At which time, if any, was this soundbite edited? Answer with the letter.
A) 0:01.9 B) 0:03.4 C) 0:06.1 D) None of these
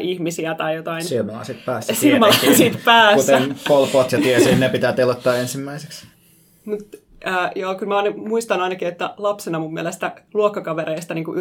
C